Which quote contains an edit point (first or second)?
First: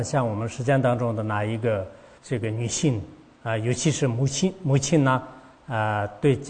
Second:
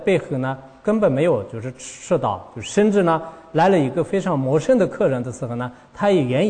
first